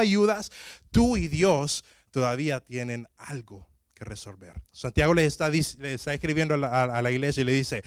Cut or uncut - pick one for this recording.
cut